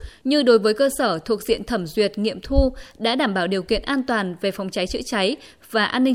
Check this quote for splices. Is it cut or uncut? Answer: uncut